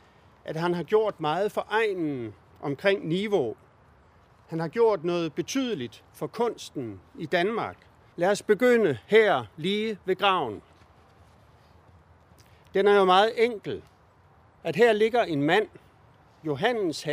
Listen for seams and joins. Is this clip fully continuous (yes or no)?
no